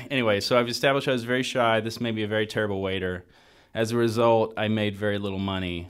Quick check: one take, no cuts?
yes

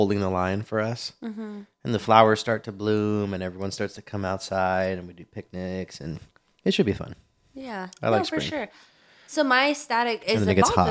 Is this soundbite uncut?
yes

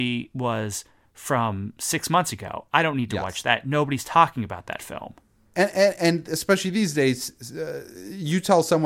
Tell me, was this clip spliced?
yes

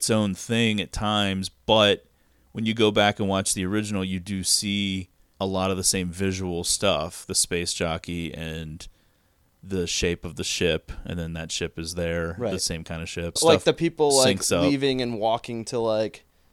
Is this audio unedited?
no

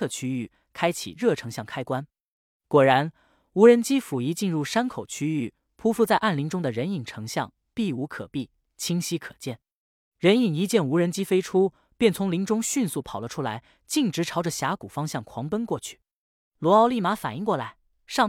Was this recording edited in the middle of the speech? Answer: no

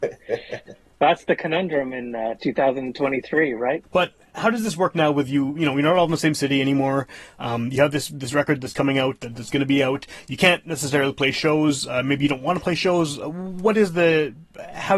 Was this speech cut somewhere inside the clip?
yes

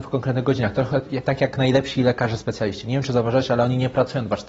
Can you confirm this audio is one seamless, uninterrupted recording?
yes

